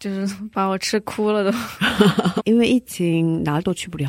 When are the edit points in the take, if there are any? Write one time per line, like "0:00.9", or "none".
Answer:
0:02.4